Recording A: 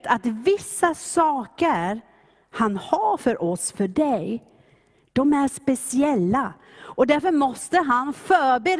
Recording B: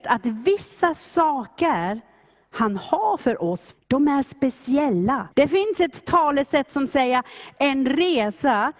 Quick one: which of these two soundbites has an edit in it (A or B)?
B